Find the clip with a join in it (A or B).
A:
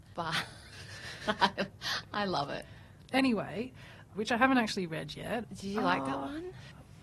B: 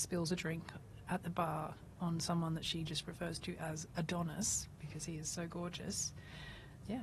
A